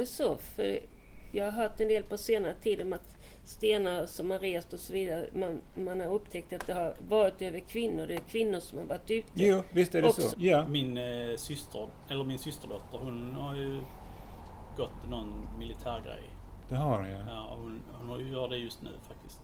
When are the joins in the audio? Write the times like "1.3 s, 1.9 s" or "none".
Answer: 10.3 s